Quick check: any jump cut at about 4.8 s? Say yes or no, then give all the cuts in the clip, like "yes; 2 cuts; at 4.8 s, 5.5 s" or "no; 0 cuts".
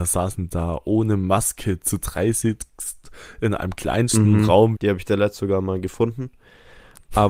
yes; 1 cut; at 4.8 s